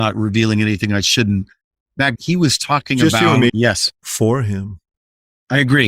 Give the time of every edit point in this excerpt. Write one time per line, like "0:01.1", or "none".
0:02.1
0:03.5